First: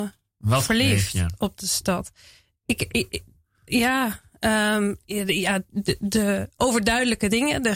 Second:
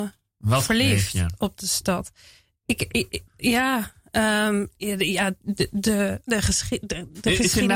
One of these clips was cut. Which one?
second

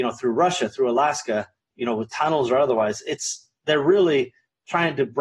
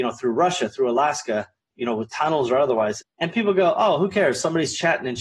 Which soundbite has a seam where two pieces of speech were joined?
second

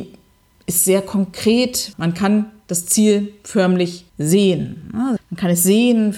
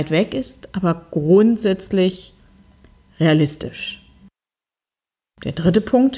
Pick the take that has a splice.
first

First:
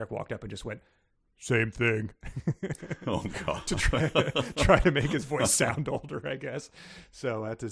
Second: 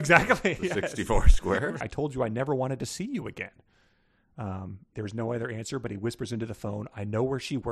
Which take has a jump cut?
second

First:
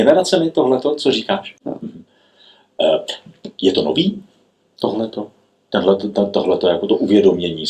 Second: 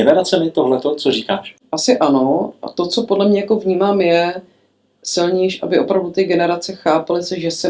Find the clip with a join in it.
first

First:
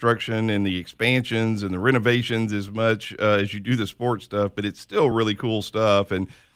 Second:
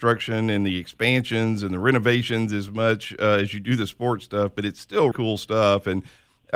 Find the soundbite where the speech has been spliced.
second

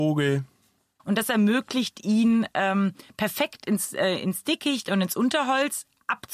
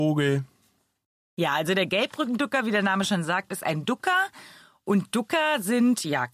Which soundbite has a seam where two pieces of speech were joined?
first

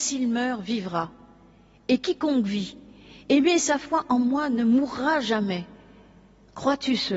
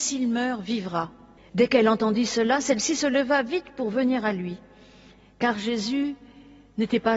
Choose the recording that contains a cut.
second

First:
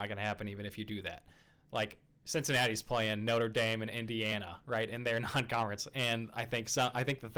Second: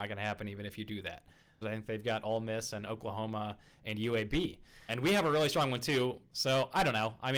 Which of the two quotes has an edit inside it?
second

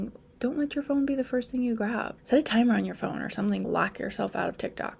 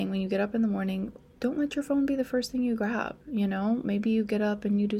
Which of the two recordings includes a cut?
first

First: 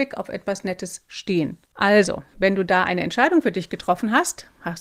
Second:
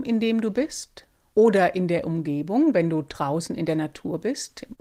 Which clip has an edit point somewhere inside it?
first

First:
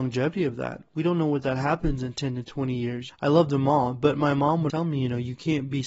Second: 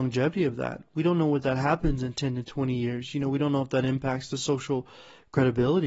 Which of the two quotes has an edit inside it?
first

